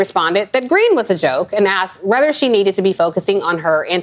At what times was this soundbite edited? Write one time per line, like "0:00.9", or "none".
none